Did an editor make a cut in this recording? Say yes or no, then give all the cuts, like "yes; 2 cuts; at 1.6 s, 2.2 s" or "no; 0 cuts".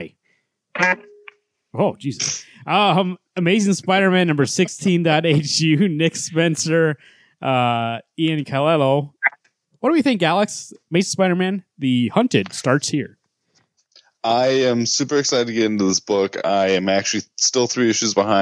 no; 0 cuts